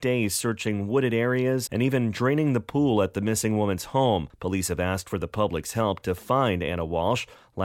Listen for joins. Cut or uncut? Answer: cut